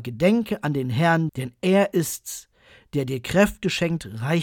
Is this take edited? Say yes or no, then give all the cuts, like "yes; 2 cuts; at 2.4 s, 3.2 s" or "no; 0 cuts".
yes; 1 cut; at 1.3 s